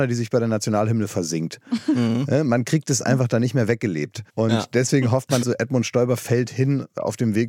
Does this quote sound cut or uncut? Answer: cut